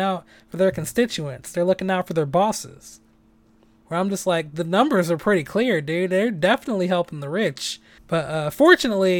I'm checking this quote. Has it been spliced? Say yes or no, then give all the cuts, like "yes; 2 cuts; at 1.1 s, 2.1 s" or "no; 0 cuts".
yes; 2 cuts; at 3.8 s, 8.0 s